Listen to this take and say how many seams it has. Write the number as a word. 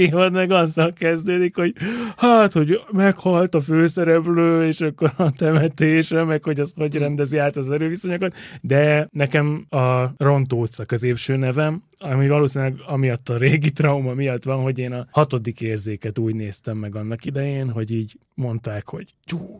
one